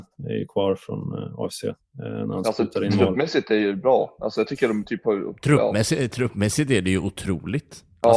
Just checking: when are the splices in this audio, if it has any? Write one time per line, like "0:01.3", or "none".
none